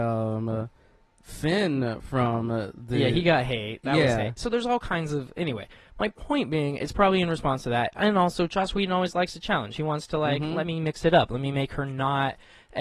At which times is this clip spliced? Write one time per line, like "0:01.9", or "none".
none